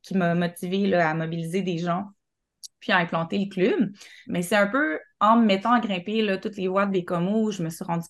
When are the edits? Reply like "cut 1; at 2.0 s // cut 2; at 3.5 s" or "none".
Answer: cut 1; at 4.2 s